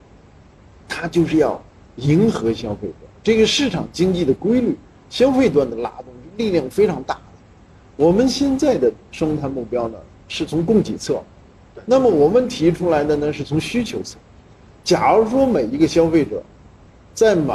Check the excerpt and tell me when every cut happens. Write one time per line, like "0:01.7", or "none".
none